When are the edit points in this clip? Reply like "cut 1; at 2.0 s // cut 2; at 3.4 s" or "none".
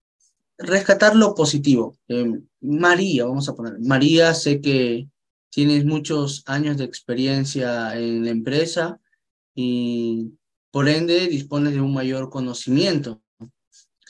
cut 1; at 2.0 s